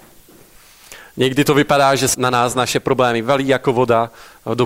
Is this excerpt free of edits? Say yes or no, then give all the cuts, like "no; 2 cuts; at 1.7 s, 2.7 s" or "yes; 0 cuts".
no; 1 cut; at 2.1 s